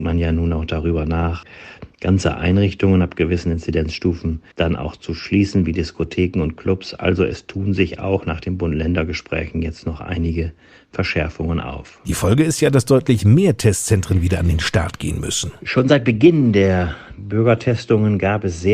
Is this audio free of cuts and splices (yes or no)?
no